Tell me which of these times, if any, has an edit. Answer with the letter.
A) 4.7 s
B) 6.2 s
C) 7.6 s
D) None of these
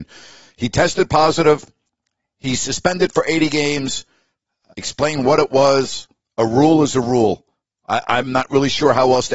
A